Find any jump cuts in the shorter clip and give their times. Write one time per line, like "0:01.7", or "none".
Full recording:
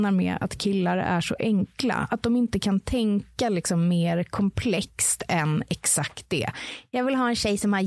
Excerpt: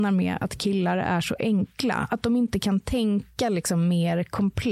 none